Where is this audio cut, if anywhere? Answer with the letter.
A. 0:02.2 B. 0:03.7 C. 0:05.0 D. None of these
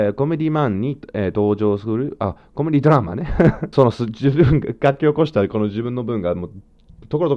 B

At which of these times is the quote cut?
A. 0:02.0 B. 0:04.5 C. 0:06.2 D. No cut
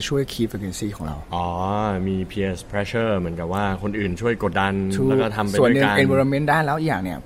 B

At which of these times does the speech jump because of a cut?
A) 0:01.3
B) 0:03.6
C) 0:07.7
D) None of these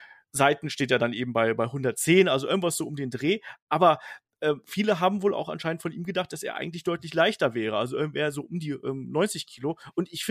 D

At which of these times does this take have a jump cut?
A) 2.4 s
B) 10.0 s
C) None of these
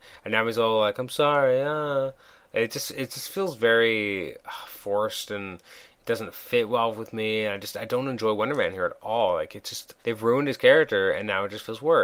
B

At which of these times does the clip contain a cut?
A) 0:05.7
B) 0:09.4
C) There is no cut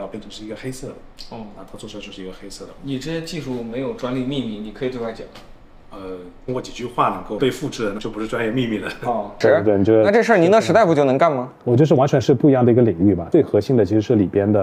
B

